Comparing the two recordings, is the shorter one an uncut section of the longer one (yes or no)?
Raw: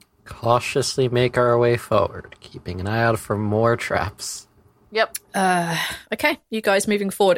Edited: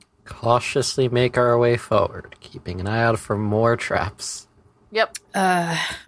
yes